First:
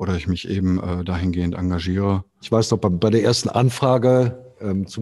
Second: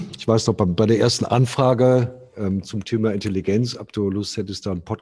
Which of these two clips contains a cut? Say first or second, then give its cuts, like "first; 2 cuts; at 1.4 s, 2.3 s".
first; 1 cut; at 2.4 s